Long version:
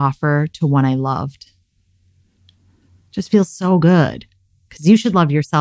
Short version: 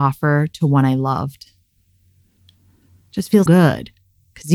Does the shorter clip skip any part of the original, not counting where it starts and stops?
yes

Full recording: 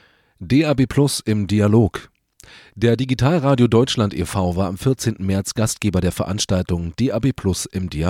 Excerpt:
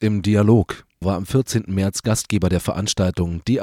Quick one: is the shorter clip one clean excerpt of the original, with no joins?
no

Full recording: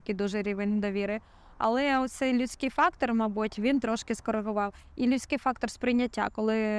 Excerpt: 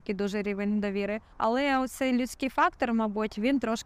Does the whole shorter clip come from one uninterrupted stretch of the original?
no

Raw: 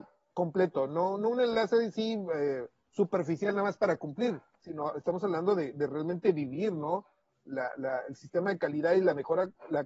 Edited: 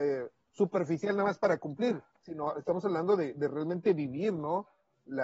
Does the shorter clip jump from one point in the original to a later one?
no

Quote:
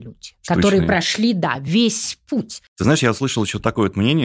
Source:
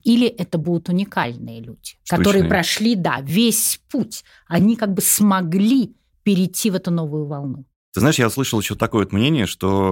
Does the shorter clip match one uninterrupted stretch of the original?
no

